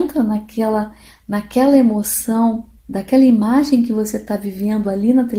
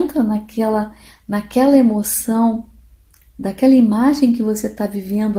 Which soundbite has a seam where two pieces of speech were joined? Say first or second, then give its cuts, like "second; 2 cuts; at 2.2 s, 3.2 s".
first; 1 cut; at 2.8 s